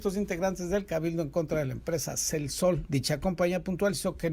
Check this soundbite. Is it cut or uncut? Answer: cut